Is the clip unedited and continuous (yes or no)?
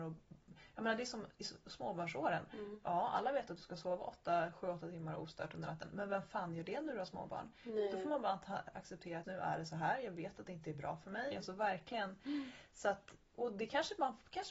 no